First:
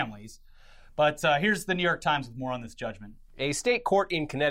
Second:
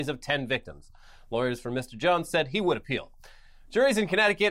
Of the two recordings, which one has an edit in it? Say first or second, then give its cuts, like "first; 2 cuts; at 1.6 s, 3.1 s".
first; 1 cut; at 3.3 s